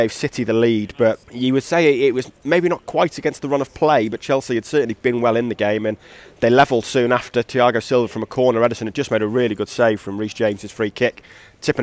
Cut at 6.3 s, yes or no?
no